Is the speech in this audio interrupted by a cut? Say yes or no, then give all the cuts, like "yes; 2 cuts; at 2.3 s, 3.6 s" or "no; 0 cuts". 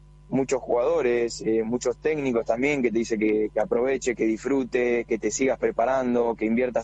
no; 0 cuts